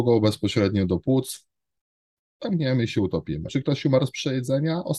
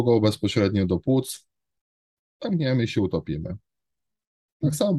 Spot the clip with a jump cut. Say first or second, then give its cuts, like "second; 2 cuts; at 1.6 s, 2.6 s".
first; 1 cut; at 3.5 s